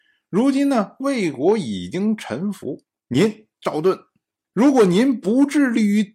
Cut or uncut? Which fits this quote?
cut